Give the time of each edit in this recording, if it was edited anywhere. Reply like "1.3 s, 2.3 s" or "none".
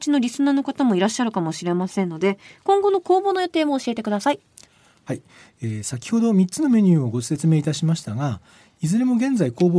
none